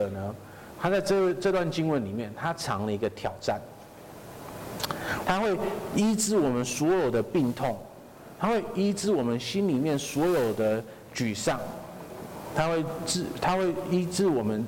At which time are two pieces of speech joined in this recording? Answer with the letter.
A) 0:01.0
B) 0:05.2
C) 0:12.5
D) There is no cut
B